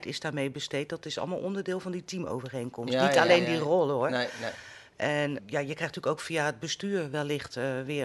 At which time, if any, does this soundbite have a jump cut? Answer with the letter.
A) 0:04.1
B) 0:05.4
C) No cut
B